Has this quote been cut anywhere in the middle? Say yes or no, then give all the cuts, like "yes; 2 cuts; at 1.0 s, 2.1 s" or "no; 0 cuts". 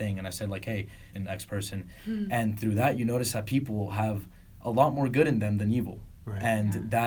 yes; 1 cut; at 1.1 s